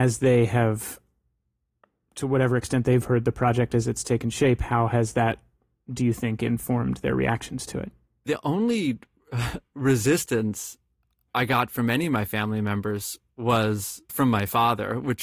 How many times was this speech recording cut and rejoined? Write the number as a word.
one